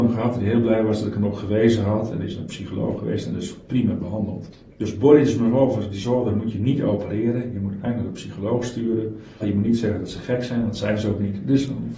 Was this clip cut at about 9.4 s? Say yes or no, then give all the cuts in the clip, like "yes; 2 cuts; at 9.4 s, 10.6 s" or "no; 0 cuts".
yes; 1 cut; at 9.4 s